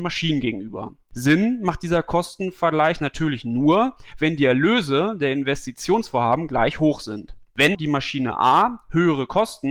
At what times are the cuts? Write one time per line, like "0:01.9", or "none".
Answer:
0:07.7